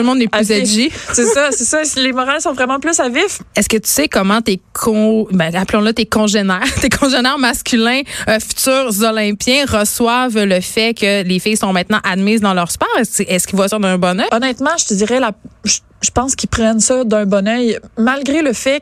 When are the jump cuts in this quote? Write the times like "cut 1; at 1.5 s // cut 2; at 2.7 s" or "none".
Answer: cut 1; at 3.5 s // cut 2; at 14.3 s